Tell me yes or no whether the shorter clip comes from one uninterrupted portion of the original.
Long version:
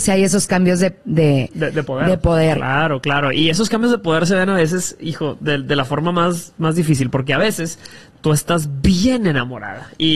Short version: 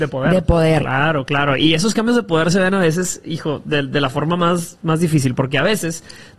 yes